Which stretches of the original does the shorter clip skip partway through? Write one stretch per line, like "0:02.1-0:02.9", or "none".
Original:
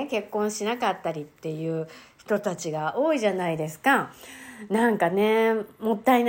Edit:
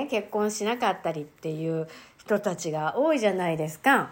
none